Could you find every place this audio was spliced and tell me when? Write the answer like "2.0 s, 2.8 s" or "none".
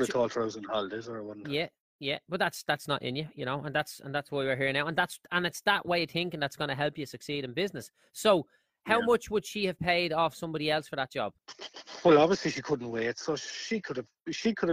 none